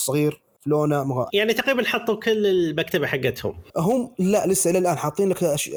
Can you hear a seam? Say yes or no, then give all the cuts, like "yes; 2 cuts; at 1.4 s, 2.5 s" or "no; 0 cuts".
yes; 2 cuts; at 1.3 s, 3.7 s